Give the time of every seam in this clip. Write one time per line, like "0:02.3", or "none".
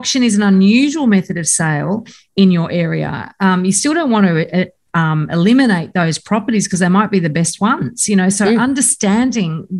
none

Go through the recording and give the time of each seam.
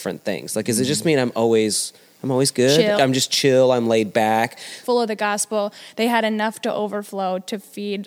0:03.0
0:04.8

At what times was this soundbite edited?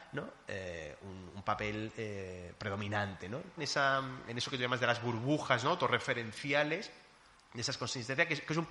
0:03.6

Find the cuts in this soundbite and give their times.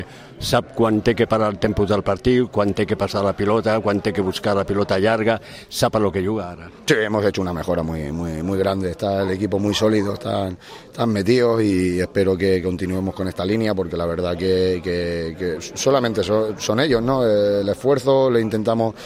none

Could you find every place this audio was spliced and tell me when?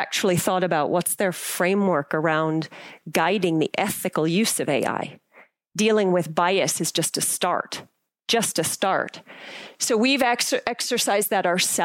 none

